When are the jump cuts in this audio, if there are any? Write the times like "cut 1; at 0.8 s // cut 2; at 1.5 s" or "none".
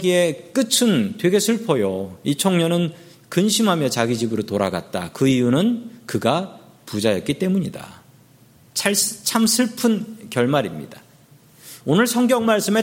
cut 1; at 11.8 s